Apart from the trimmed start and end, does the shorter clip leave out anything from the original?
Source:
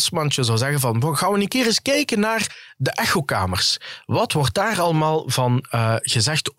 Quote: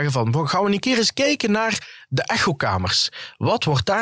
no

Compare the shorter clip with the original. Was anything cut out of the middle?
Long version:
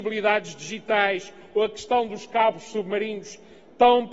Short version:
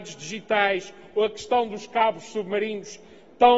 no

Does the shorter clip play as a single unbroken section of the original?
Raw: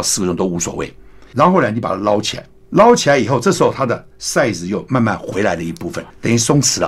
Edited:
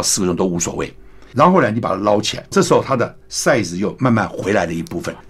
no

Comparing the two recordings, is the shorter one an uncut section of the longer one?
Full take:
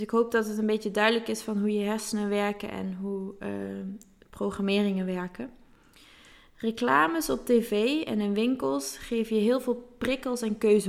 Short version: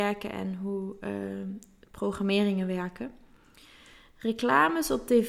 yes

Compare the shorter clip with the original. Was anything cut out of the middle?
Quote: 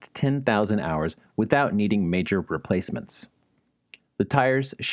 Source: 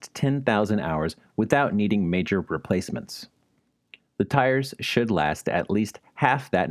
no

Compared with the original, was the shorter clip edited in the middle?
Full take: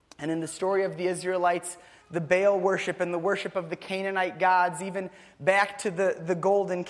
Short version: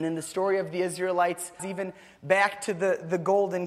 yes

